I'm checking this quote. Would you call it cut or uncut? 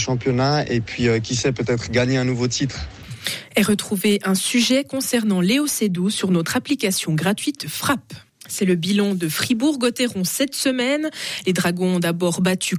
cut